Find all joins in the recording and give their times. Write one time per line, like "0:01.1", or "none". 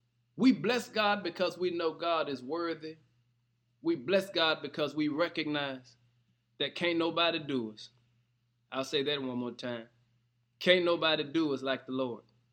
none